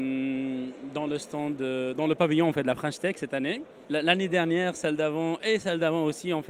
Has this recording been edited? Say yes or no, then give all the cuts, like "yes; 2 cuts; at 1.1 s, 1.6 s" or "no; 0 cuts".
no; 0 cuts